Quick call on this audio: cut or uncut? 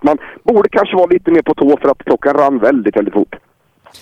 uncut